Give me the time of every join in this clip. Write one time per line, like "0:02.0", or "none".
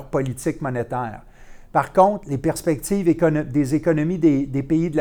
none